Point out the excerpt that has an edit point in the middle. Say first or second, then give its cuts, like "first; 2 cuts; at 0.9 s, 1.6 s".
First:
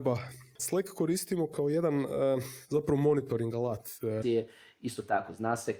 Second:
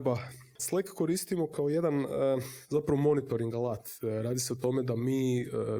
first; 1 cut; at 4.2 s